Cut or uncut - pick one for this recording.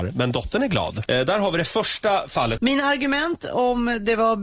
cut